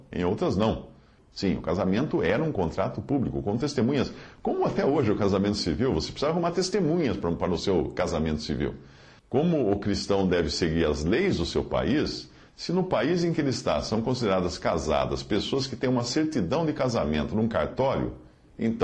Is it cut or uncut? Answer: cut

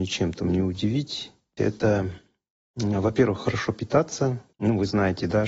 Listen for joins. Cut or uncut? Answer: cut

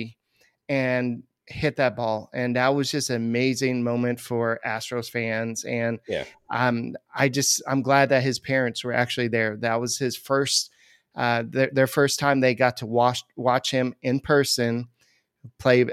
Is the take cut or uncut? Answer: uncut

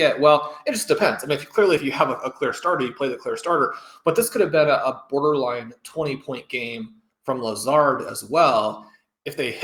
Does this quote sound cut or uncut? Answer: uncut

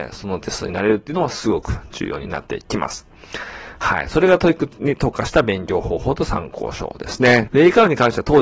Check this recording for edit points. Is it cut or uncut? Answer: cut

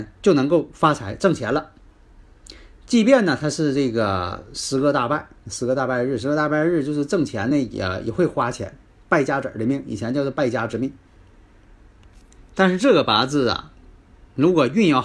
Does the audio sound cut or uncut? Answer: uncut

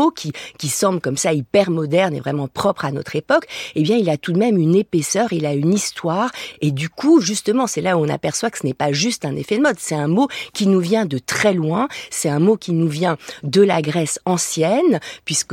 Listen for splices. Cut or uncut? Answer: uncut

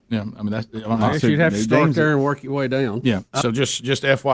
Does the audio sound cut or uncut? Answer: cut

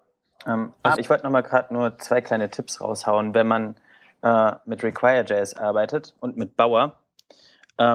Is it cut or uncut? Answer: cut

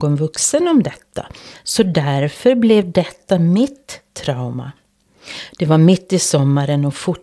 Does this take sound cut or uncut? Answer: cut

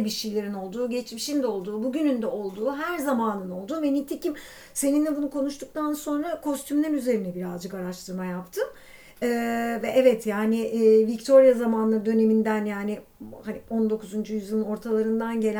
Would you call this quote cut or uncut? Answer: uncut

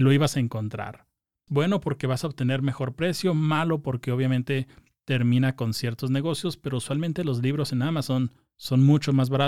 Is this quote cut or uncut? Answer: cut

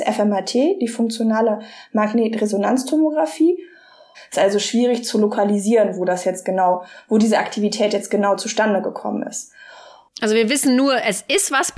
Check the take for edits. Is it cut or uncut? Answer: cut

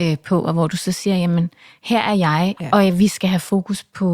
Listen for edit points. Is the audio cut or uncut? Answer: cut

